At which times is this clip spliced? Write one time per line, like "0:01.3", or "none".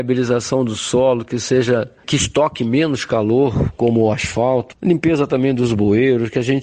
none